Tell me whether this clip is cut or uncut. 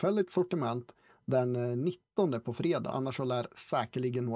cut